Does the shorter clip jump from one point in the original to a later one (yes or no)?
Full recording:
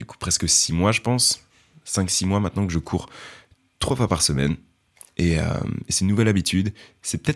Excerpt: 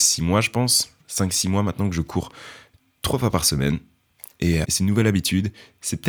yes